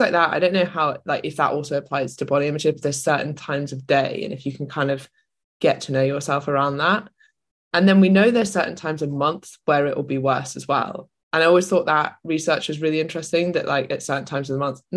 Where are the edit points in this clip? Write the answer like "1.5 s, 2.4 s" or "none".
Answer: none